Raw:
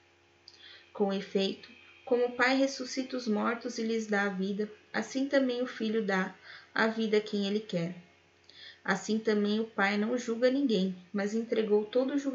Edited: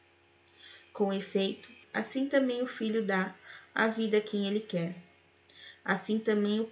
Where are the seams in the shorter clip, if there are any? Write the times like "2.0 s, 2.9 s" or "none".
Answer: 1.8 s